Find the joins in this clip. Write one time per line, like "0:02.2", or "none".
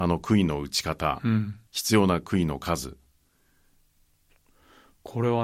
0:01.7